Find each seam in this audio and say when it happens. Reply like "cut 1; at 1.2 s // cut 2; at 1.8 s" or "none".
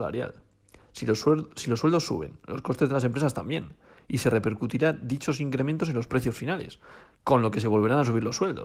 none